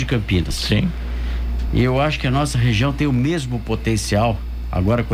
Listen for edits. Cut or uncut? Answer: uncut